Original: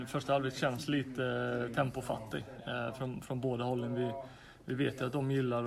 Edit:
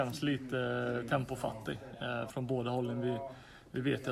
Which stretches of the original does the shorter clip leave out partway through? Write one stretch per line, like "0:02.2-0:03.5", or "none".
0:03.0-0:03.2